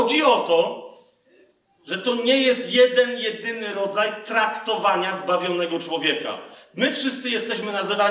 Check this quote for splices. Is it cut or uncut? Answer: uncut